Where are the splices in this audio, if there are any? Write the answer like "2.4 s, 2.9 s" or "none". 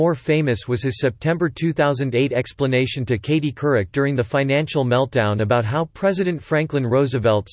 none